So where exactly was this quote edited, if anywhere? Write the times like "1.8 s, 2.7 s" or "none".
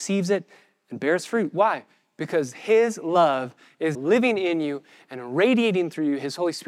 3.9 s